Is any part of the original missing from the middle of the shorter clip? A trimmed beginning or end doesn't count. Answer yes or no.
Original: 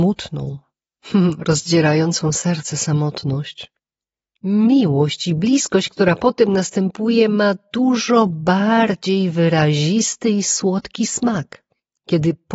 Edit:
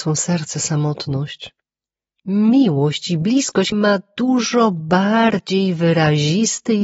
yes